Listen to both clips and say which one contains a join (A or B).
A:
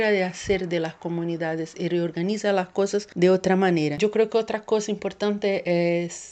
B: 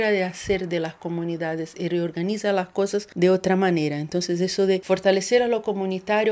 A